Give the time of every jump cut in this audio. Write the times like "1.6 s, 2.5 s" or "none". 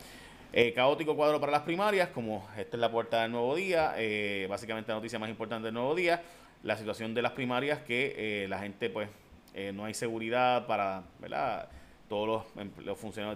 none